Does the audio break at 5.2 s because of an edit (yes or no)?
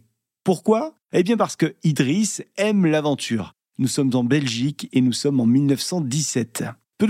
no